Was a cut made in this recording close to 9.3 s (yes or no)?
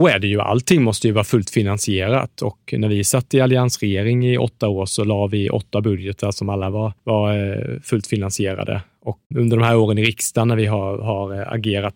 yes